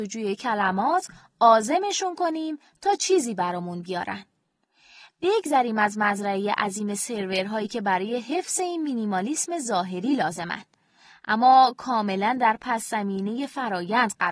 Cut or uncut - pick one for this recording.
uncut